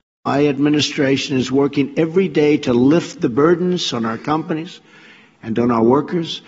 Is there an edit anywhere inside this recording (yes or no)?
no